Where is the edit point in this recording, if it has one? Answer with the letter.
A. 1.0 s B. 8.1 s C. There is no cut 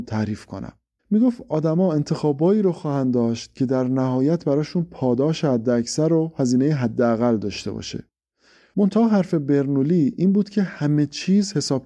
A